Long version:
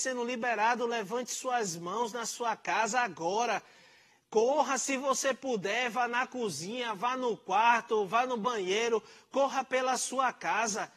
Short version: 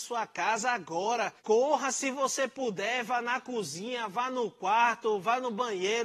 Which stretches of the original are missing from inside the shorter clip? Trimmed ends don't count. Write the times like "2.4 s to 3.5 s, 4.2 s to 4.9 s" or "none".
3.7 s to 4.2 s